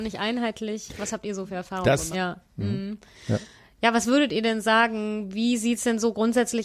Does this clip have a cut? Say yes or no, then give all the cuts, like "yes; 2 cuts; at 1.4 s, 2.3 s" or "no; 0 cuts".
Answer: yes; 1 cut; at 2.1 s